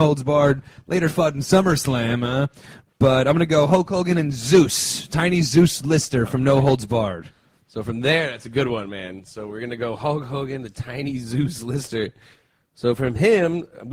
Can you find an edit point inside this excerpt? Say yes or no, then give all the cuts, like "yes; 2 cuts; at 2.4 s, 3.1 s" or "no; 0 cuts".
no; 0 cuts